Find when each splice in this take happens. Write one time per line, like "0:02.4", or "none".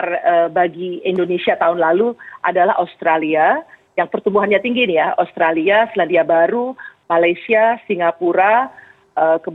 none